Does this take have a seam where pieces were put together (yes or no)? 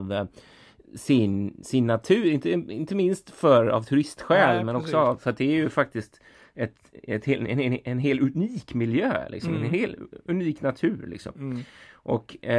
no